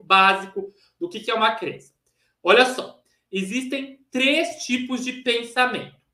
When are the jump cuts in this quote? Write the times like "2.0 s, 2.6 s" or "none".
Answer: none